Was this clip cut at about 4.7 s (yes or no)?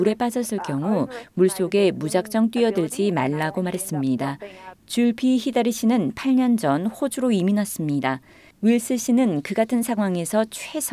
yes